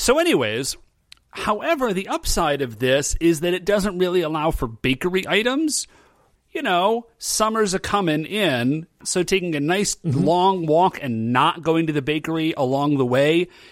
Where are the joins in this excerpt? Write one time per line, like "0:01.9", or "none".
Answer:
0:06.4
0:09.0

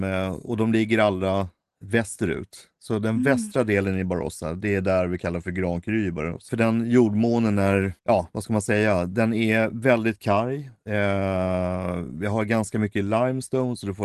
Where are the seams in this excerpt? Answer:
0:06.5
0:08.0

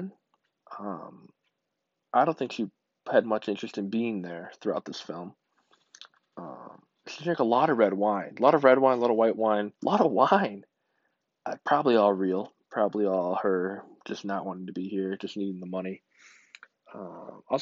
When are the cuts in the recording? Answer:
0:09.8

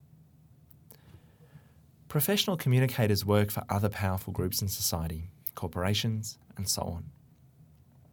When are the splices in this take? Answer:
0:06.5

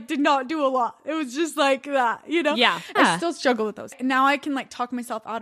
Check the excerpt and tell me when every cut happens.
0:03.0

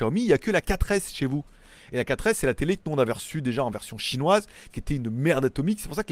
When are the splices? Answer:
none

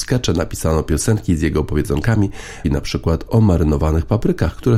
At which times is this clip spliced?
0:02.6

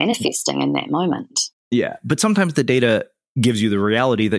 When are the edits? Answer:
0:01.6

